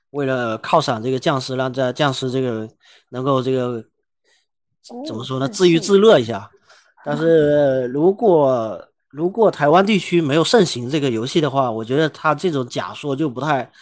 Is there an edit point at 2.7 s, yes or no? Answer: no